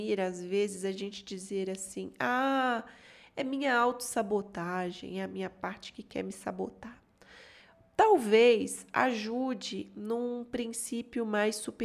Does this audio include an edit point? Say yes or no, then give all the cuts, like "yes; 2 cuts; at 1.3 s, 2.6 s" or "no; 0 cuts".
no; 0 cuts